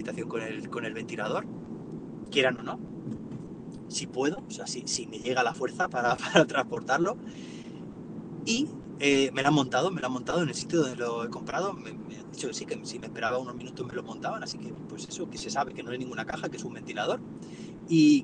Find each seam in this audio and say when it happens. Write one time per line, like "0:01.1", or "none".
none